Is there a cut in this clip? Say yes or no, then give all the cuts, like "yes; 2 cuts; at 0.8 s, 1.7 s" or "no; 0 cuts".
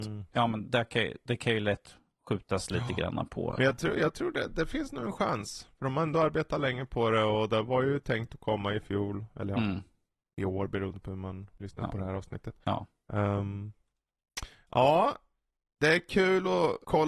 no; 0 cuts